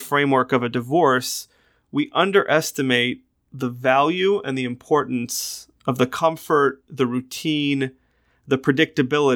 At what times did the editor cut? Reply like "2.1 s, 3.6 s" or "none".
none